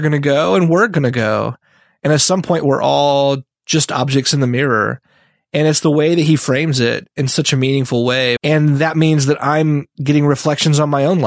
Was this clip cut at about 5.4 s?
no; 1 cut; at 8.4 s

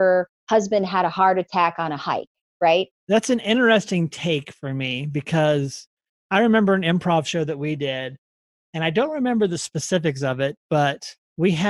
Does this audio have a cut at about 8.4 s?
no; 1 cut; at 2.9 s

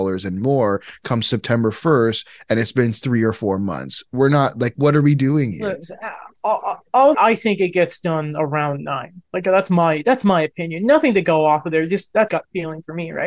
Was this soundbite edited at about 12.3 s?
yes; 2 cuts; at 7.1 s, 12.3 s

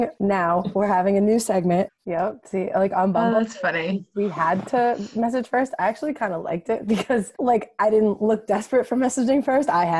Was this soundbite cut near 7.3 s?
yes; 2 cuts; at 1.9 s, 7.3 s

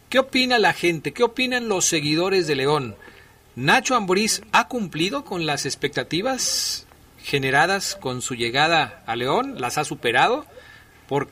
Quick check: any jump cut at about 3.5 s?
no; 1 cut; at 1.1 s

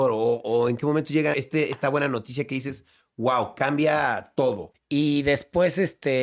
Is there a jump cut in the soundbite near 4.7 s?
yes; 2 cuts; at 1.3 s, 4.7 s

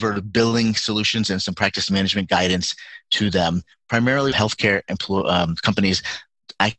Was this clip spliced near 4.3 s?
yes; 1 cut; at 4.3 s

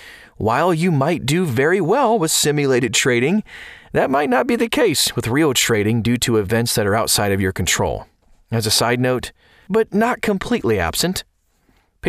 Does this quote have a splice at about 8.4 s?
no; 1 cut; at 9.7 s

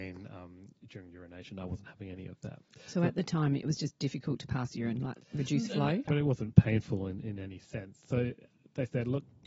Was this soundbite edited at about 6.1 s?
yes; 1 cut; at 6.1 s

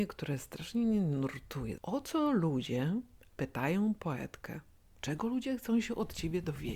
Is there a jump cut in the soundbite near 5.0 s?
yes; 1 cut; at 5.0 s

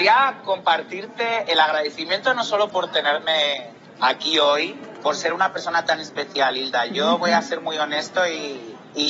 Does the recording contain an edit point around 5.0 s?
yes; 1 cut; at 5.0 s

